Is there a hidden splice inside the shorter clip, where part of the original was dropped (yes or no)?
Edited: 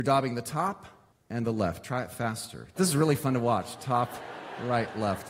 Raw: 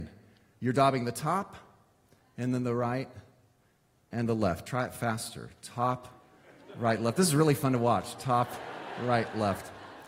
yes